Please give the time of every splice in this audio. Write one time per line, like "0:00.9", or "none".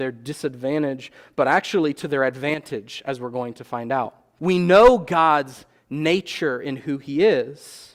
0:04.4